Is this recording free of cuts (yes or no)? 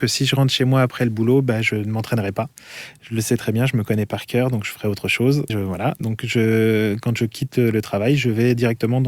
no